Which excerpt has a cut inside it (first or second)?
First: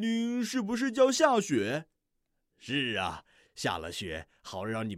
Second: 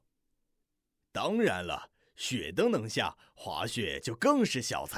first